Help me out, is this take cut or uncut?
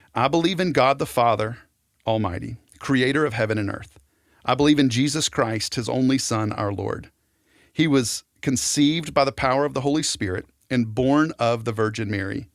uncut